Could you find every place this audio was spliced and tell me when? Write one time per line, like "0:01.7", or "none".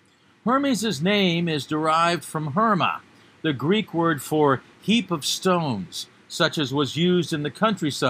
none